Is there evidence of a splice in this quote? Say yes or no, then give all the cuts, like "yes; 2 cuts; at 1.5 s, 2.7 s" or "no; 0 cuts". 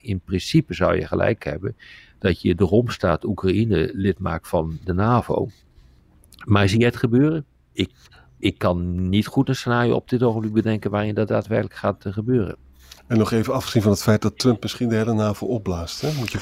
no; 0 cuts